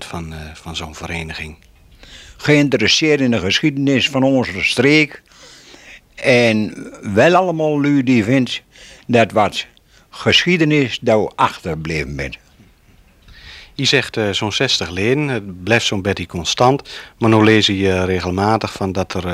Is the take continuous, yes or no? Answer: yes